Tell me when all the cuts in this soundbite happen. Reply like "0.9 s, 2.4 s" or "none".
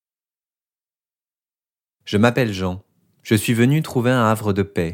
none

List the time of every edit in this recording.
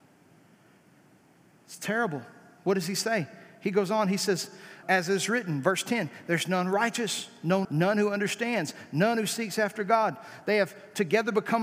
4.8 s, 7.6 s, 10.4 s

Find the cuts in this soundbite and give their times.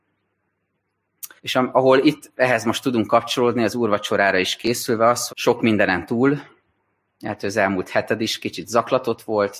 1.4 s, 5.3 s

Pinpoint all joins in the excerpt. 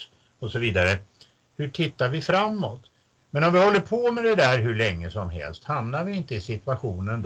1.5 s, 3.2 s

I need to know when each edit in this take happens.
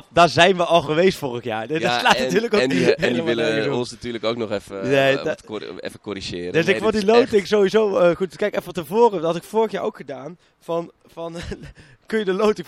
none

